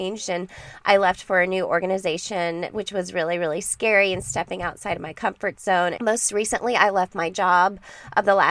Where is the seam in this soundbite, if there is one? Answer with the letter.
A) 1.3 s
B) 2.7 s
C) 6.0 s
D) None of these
C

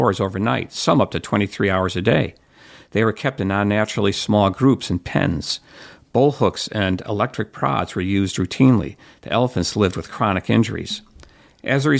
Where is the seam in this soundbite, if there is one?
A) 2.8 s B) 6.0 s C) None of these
C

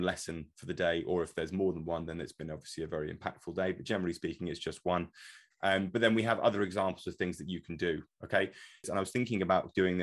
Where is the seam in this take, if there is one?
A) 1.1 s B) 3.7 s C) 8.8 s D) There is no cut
C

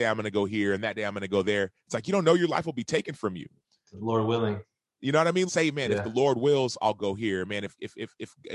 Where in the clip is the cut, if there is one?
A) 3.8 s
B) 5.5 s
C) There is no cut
B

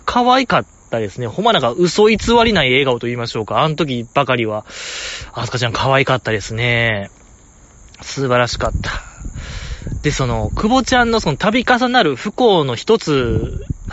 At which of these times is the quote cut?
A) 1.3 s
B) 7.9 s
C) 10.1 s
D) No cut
D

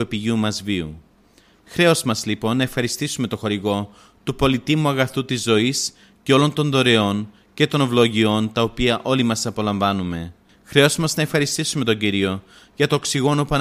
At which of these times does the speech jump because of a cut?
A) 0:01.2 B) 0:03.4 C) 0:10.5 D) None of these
C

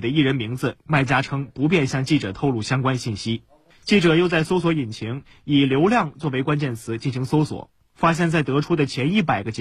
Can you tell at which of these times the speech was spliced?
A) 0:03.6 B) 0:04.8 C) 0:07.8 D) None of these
D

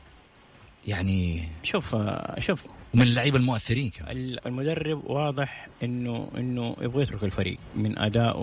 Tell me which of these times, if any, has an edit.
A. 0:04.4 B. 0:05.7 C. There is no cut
A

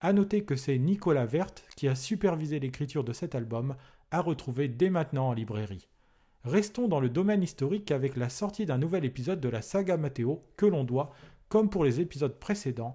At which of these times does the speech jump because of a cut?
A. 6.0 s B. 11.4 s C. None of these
C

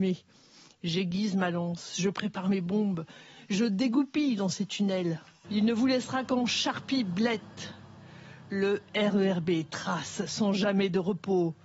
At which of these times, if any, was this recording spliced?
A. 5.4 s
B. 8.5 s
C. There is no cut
A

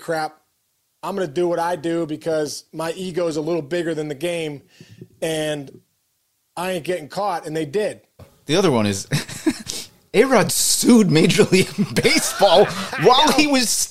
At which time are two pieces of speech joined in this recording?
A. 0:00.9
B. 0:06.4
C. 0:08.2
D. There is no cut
C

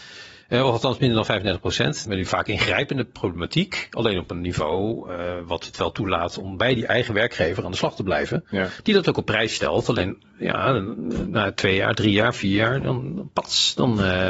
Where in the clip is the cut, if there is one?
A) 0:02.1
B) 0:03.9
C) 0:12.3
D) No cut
A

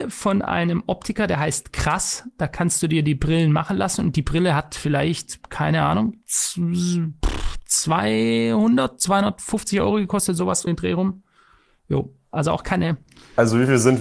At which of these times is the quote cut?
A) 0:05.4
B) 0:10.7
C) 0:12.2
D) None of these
B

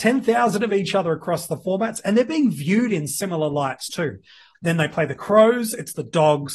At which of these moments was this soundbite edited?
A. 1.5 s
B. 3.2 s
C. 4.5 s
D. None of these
C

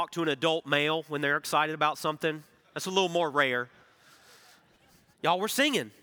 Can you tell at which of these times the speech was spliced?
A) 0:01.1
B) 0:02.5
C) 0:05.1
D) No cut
C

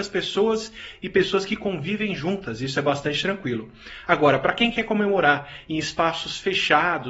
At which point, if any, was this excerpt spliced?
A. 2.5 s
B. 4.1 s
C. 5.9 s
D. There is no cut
D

